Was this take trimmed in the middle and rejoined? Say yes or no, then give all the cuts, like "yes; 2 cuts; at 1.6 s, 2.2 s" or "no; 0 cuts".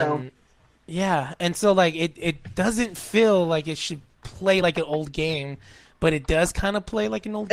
no; 0 cuts